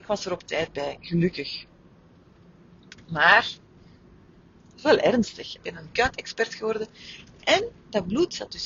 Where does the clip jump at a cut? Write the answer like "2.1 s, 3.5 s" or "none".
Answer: 5.6 s

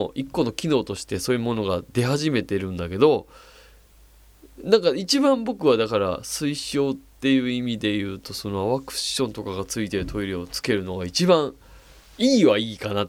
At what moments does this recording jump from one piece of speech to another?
none

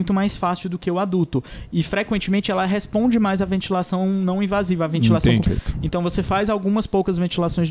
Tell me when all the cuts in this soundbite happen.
5.4 s

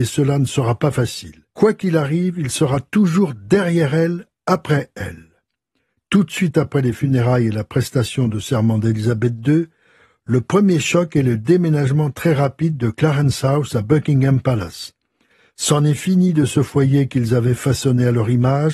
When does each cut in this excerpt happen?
1.5 s

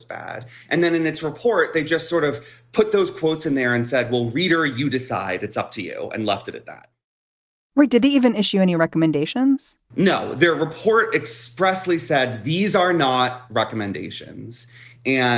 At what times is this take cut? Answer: none

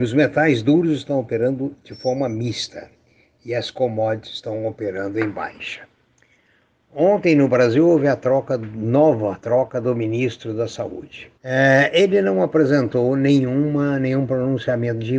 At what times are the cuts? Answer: 11.4 s

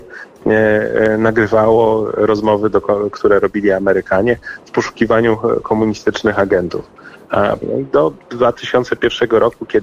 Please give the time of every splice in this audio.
7.6 s

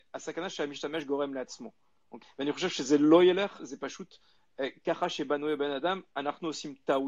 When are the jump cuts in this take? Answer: 2.2 s, 3.6 s

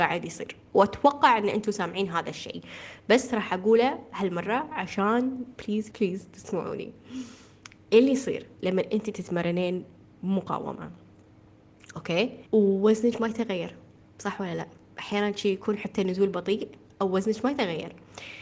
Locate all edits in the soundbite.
5.9 s, 12.5 s

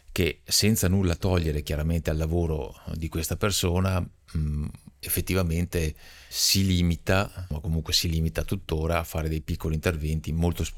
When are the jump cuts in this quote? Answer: 6.3 s, 7.5 s

